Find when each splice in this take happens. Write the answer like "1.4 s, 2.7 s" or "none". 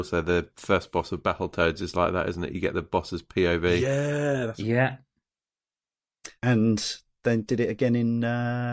6.4 s